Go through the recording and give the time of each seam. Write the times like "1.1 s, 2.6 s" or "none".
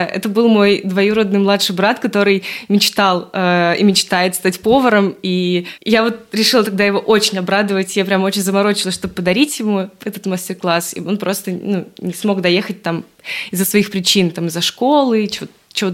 none